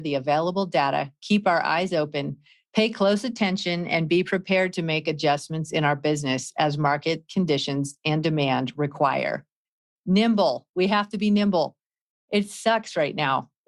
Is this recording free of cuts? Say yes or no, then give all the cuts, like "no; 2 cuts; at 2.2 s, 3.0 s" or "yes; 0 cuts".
yes; 0 cuts